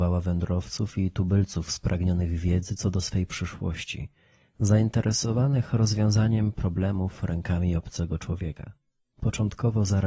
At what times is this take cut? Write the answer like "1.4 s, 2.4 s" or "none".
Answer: 9.1 s